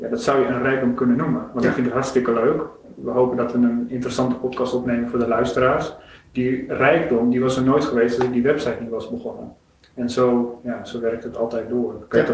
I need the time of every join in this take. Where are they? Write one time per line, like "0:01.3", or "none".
none